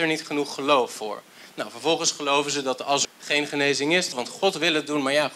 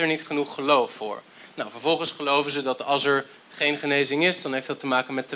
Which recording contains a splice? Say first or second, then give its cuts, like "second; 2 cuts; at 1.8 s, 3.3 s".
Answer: first; 2 cuts; at 3.0 s, 4.1 s